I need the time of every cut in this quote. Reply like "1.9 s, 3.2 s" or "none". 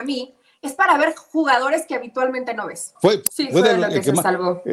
3.0 s